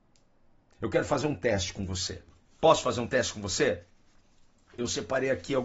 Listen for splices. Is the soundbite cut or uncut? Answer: uncut